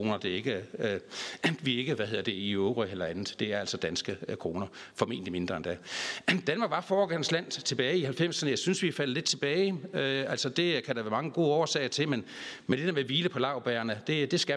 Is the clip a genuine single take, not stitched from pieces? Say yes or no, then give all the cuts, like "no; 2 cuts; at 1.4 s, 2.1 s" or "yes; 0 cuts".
yes; 0 cuts